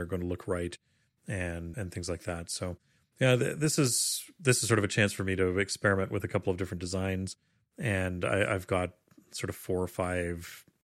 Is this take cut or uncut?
cut